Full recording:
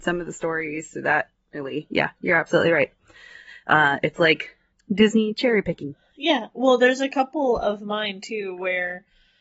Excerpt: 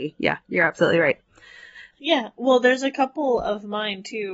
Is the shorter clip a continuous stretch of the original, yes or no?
no